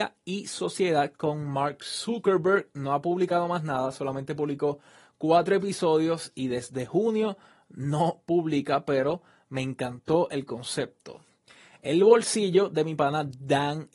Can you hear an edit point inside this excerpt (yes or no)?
no